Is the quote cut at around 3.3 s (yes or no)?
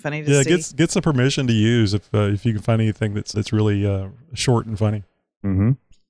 yes